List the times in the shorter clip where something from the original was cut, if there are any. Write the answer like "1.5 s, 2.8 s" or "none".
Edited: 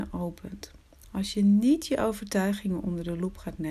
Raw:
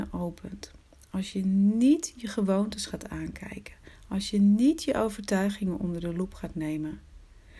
1.0 s